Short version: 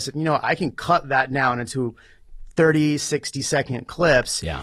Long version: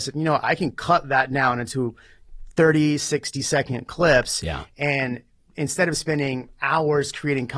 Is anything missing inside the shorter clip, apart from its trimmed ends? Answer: no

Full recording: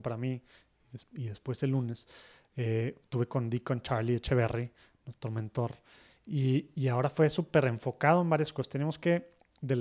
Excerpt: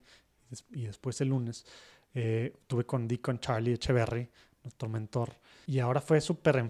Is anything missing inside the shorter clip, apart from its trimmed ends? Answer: yes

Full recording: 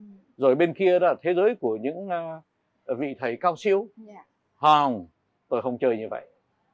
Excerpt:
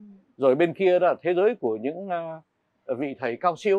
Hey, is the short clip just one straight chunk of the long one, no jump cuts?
yes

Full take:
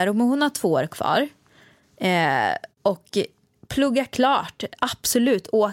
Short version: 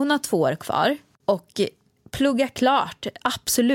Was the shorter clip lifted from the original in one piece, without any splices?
no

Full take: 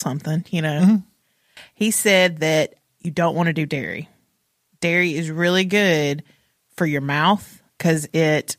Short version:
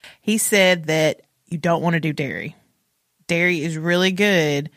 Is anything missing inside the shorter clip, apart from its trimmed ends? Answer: no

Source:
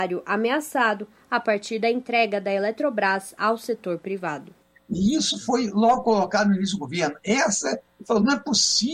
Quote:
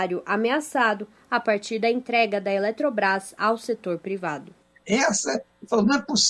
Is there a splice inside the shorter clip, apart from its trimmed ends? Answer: yes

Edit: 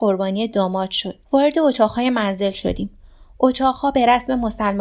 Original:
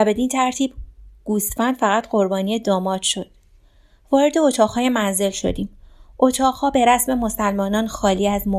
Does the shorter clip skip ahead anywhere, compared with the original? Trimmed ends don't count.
yes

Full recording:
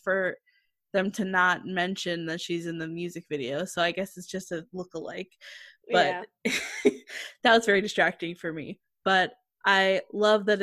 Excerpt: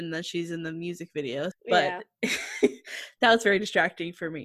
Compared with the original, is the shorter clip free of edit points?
no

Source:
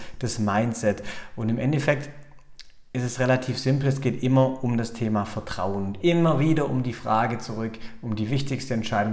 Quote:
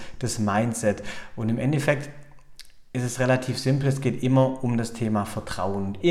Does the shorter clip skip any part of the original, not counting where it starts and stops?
no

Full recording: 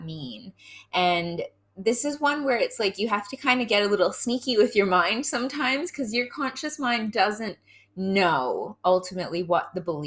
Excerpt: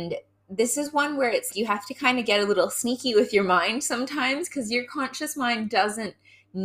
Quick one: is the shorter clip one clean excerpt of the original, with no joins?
no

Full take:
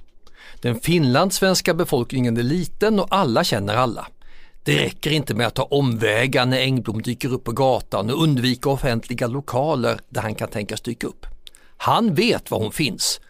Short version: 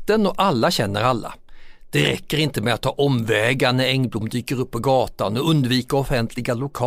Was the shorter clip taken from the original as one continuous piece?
yes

